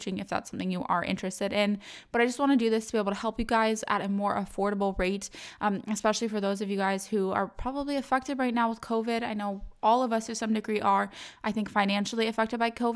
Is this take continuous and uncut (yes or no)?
yes